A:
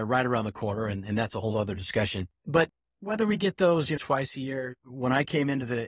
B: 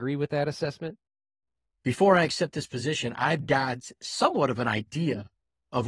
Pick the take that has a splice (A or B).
A